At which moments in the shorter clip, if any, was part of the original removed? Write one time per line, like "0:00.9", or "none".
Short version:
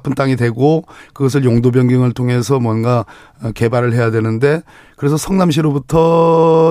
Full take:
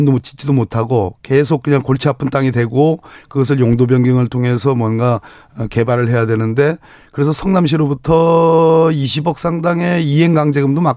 none